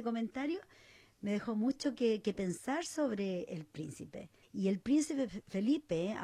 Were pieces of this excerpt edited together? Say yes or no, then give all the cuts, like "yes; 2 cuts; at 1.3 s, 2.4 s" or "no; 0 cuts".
yes; 1 cut; at 4.4 s